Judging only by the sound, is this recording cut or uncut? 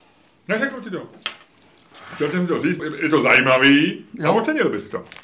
cut